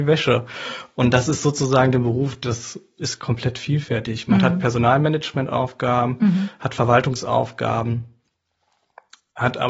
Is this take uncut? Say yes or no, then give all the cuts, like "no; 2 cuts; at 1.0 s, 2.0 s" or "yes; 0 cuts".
yes; 0 cuts